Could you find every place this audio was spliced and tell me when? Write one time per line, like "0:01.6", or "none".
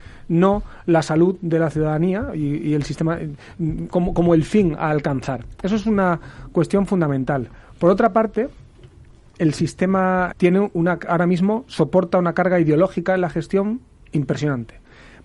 0:09.3
0:10.3